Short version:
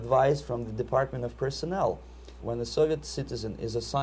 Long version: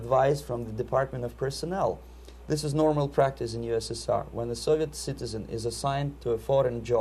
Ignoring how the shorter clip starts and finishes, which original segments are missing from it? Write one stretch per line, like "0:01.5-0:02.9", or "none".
0:02.4-0:04.3

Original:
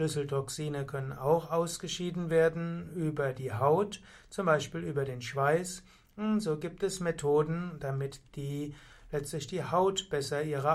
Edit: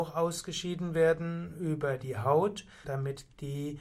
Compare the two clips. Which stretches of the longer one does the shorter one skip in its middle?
0:04.2-0:07.8

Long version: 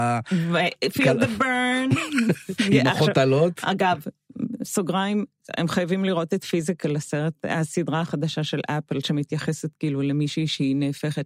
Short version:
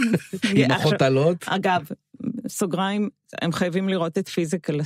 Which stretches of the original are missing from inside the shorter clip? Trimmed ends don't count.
none

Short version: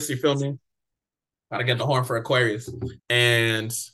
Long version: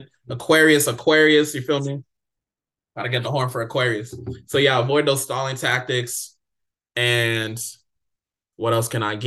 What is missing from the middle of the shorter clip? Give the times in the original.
0:04.4-0:06.8

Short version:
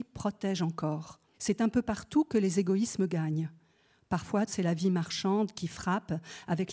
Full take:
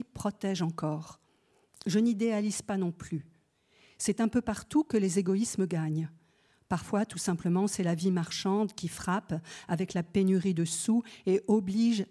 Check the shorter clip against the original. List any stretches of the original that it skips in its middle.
0:01.3-0:03.9
0:07.1-0:07.7

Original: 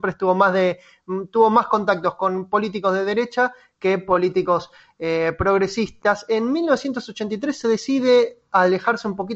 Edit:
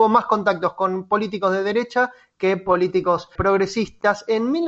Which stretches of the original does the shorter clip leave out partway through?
0:04.8-0:05.4

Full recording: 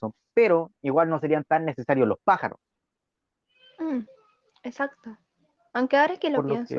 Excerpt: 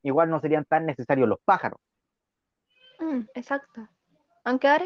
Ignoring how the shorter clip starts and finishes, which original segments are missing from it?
0:04.1-0:04.6

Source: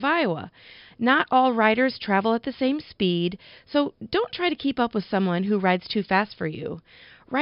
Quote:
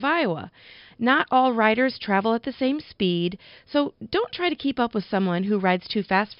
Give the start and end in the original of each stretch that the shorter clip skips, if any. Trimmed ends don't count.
none

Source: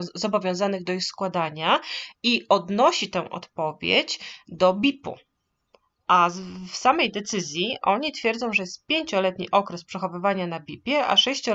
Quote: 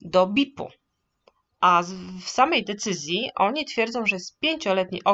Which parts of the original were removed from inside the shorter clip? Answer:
none

